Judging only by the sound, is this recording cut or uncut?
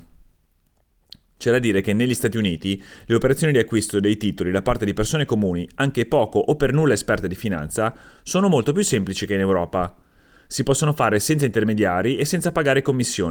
uncut